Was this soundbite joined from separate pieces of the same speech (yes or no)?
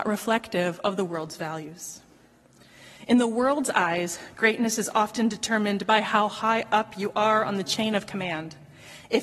no